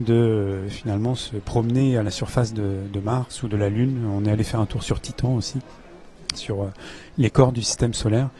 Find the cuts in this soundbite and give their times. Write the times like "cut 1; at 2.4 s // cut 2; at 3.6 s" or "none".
cut 1; at 6.4 s